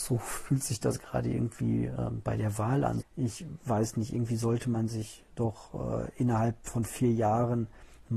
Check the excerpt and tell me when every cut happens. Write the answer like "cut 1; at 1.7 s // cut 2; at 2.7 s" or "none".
cut 1; at 3.0 s